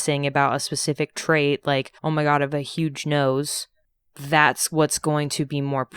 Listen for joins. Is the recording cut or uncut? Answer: cut